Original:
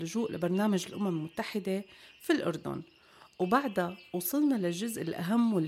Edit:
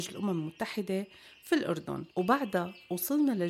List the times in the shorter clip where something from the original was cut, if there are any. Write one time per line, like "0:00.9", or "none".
0:02.1